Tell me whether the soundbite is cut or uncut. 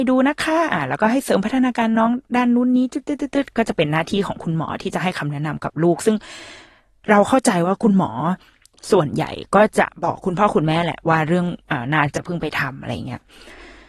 cut